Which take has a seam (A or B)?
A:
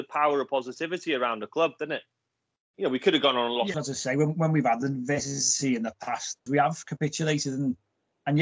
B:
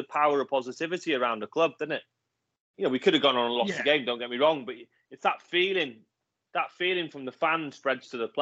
A